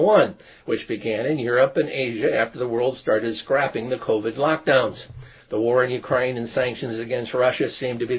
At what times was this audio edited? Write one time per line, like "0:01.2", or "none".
0:05.4